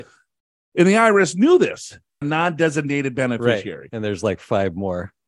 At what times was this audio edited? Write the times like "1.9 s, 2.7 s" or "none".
2.2 s